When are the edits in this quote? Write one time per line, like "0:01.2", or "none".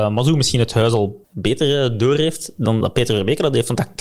0:01.2
0:02.8